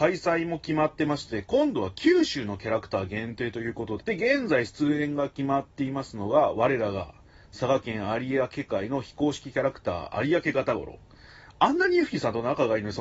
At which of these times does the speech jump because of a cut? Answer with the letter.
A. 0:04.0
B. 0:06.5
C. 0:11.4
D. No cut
A